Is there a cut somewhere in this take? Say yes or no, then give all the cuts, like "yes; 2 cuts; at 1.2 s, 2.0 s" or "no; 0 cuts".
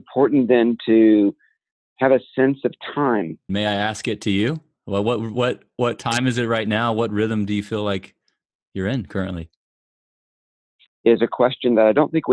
yes; 2 cuts; at 3.5 s, 10.9 s